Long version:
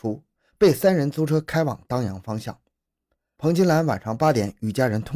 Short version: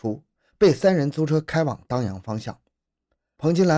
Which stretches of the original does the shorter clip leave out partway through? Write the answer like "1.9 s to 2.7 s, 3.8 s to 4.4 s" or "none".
none